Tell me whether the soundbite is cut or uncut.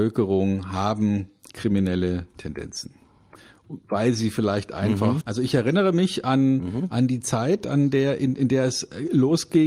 cut